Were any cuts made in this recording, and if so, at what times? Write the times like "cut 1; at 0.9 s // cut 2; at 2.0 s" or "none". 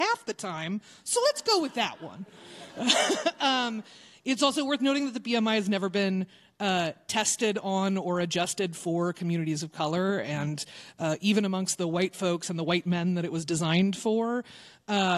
none